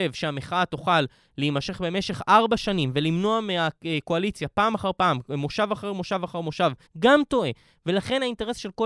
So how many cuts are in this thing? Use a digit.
1